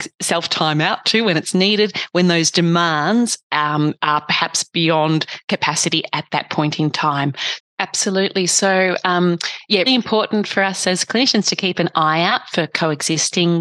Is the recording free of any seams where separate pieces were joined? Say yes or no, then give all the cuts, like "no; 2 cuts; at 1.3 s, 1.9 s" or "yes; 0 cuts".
no; 2 cuts; at 7.6 s, 9.9 s